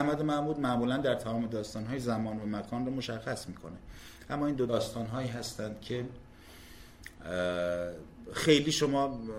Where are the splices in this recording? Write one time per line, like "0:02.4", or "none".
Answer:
0:04.7

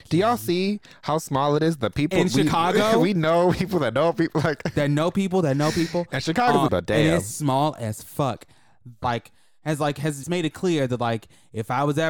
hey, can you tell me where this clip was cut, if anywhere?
0:06.7
0:09.0
0:10.2

